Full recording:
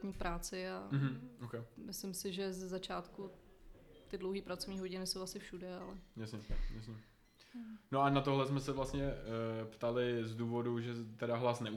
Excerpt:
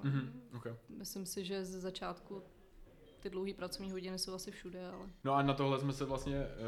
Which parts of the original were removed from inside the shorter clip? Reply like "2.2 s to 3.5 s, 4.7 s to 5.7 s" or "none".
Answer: 6.1 s to 7.9 s